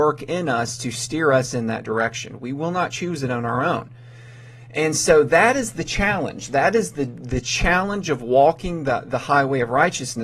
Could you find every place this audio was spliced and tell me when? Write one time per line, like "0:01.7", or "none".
none